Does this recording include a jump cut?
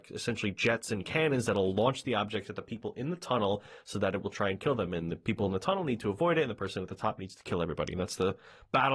no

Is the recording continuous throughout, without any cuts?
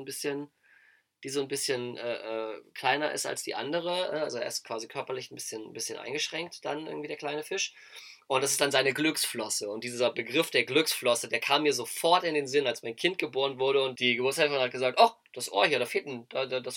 no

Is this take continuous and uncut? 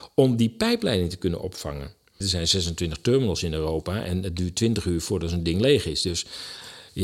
no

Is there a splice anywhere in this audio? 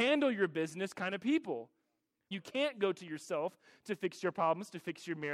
yes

